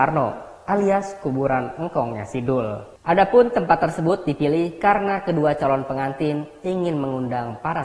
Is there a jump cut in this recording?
no; 0 cuts

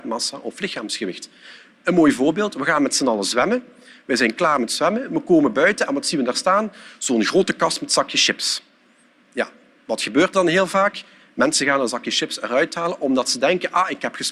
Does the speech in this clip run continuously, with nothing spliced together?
yes; 0 cuts

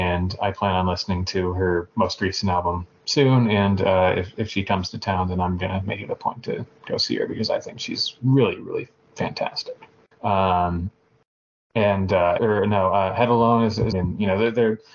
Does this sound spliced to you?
yes; 3 cuts; at 10.1 s, 12.4 s, 13.9 s

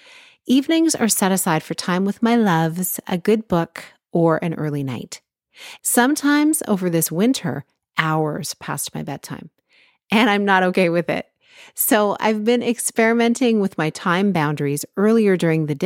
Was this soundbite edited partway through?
yes; 1 cut; at 5.8 s

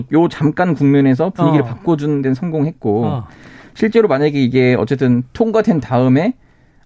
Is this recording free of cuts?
yes; 0 cuts

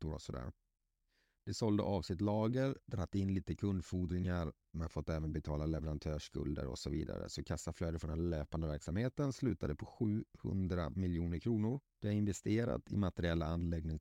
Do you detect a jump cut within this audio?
yes; 1 cut; at 2.8 s

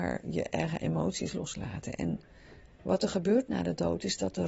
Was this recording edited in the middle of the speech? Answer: no; 0 cuts

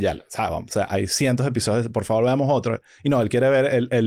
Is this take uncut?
yes; 0 cuts

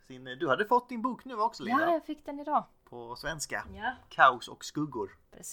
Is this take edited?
no; 0 cuts

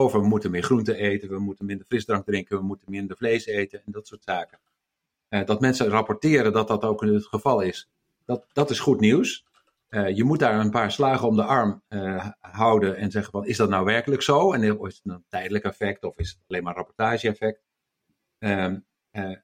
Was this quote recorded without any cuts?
yes; 0 cuts

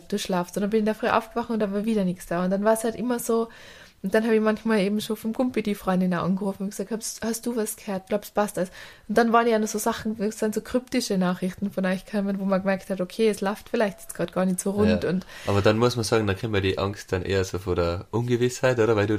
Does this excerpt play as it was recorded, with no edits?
yes; 0 cuts

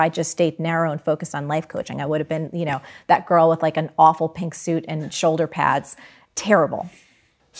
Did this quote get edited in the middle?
no; 0 cuts

